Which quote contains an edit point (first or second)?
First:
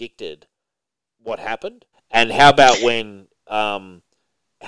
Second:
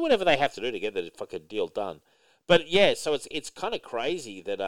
first